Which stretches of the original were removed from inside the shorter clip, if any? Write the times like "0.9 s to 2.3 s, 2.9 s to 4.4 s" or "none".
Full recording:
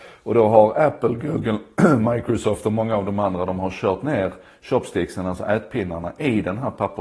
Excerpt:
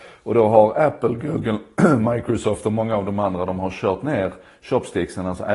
none